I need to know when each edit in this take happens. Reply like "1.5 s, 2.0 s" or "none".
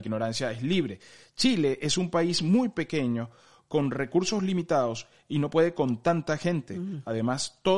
none